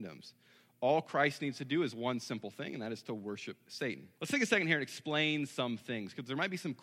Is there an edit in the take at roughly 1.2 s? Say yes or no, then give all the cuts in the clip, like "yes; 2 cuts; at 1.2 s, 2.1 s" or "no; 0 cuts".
no; 1 cut; at 4.2 s